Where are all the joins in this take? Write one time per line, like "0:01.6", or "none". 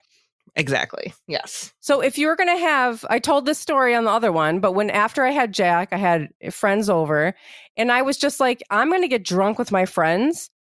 none